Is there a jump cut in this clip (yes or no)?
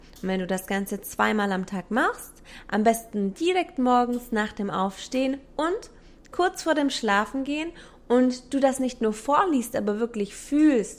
no